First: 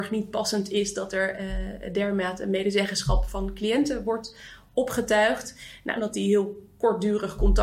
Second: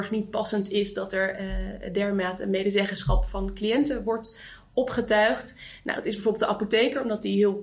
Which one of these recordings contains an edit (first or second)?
first